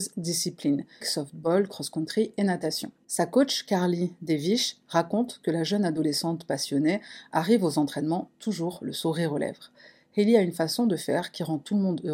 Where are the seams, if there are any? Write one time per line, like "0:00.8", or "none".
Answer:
0:01.0